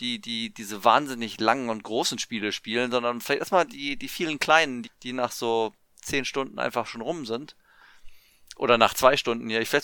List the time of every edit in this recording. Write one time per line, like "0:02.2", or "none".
0:04.8